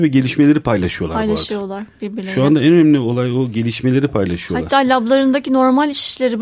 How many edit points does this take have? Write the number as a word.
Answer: zero